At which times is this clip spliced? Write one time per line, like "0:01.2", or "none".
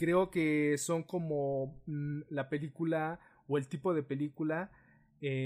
none